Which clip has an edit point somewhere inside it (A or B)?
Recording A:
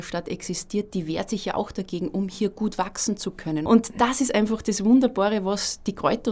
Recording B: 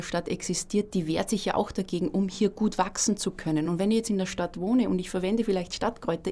A